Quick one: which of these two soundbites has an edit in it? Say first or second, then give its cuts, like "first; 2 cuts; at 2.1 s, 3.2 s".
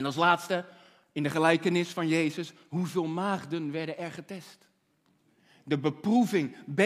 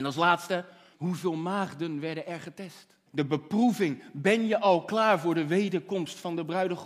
second; 2 cuts; at 0.9 s, 3.1 s